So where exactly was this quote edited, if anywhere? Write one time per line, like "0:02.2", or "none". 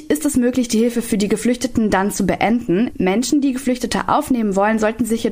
0:02.9

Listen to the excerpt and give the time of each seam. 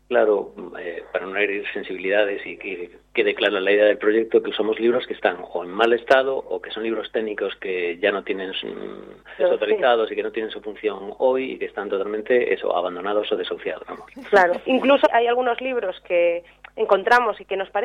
0:09.4
0:13.8
0:15.0

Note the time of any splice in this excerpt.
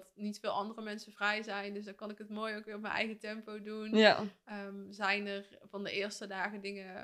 none

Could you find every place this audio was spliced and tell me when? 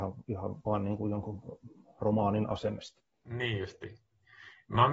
none

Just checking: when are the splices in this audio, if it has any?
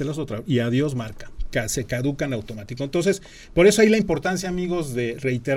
none

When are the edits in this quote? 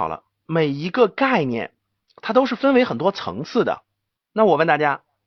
0:04.2

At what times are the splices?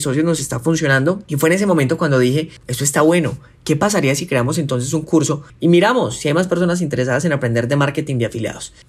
0:02.6

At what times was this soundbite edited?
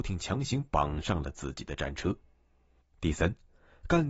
0:02.8

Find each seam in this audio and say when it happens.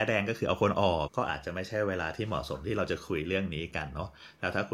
0:01.1

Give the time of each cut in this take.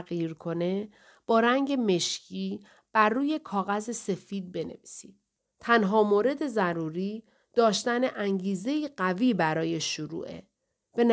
0:05.4

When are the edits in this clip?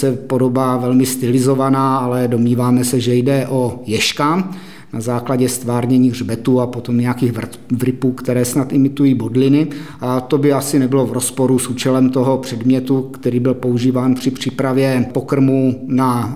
none

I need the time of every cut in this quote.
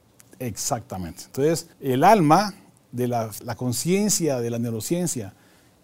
0:01.7
0:03.4

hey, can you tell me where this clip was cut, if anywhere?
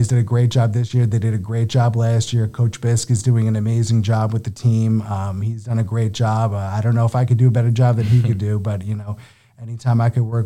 none

